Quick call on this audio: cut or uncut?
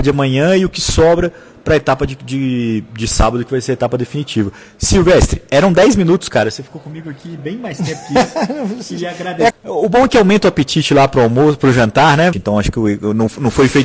cut